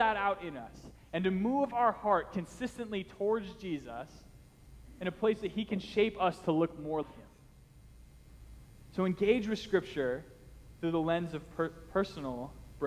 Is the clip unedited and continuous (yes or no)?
no